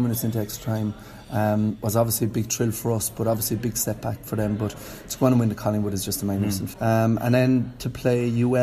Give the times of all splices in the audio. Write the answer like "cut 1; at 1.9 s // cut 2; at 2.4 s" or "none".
cut 1; at 6.7 s